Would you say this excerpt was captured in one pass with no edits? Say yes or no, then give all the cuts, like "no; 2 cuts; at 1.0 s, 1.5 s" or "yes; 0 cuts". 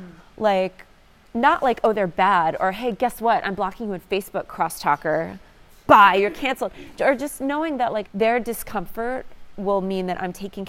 no; 1 cut; at 8.0 s